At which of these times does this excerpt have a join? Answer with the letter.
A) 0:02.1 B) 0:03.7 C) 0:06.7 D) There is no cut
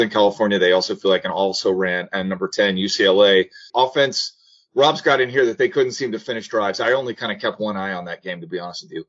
B